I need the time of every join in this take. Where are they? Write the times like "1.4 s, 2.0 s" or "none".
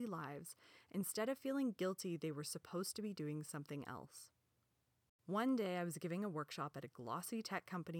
5.1 s